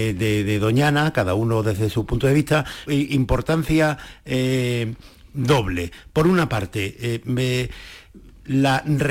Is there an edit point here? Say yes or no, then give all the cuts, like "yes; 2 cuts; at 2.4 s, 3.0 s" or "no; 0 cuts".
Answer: yes; 1 cut; at 2.9 s